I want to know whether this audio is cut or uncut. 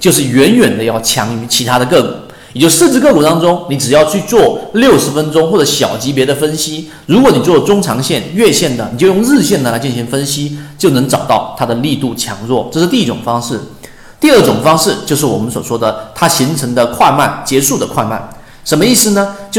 uncut